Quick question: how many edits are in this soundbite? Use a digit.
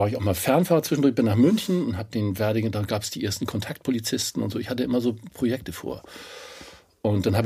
0